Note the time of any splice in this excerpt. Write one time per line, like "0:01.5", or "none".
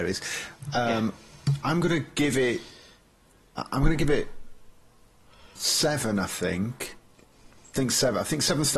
none

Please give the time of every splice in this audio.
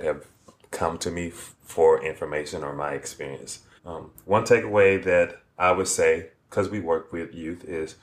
0:03.8

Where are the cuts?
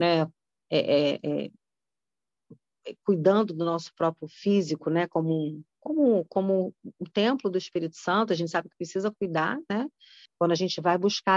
0:10.3

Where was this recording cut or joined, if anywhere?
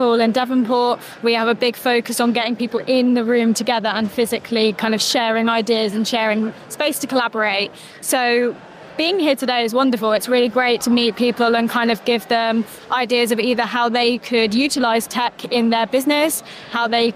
none

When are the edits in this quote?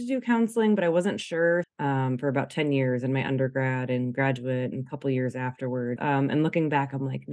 0:01.6
0:06.0

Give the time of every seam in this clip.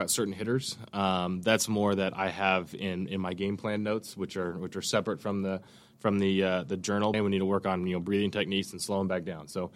0:07.1

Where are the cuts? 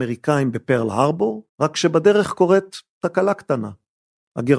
0:01.5

